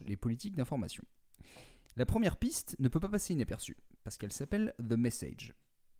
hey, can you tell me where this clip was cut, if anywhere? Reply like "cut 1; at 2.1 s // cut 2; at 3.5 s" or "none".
none